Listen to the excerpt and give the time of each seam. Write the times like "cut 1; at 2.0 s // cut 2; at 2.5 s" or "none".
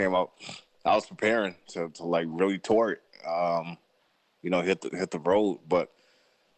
none